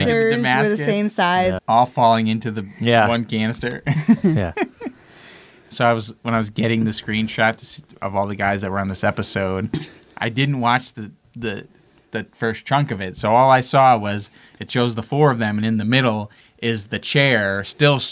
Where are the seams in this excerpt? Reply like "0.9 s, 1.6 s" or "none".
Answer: 1.6 s